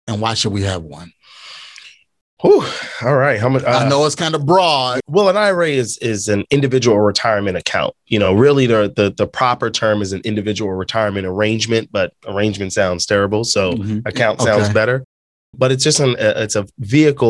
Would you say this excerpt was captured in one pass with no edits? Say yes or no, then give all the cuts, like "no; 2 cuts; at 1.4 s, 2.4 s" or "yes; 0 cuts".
yes; 0 cuts